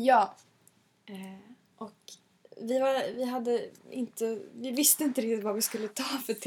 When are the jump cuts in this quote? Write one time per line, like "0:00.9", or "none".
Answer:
none

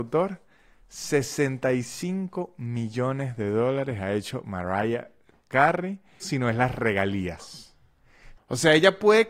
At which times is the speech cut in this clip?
0:06.2
0:08.4

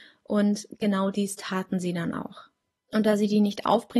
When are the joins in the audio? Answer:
0:02.8

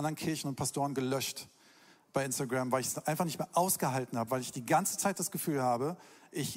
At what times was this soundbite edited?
none

